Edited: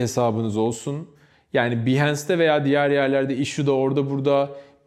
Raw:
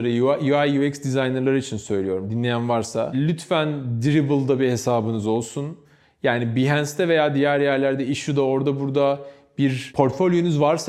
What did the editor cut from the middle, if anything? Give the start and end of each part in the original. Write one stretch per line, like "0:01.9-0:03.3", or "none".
none